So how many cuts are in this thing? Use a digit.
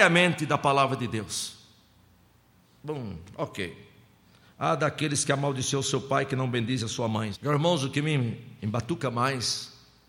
2